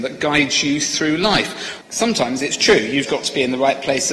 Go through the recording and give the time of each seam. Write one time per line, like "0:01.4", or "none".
0:01.8
0:03.1